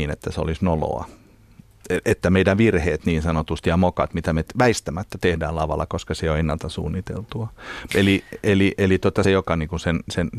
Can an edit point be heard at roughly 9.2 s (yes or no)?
yes